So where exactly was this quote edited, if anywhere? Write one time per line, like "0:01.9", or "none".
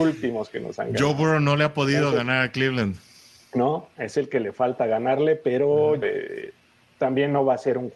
0:06.0